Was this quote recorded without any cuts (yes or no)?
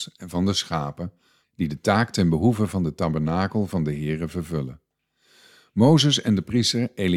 no